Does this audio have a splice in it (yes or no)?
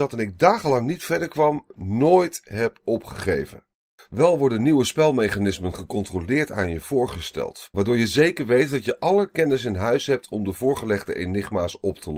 yes